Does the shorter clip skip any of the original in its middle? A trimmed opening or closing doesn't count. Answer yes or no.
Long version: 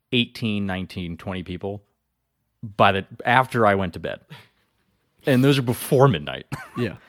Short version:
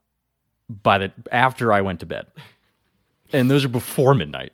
no